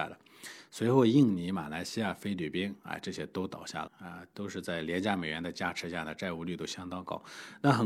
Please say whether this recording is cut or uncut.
cut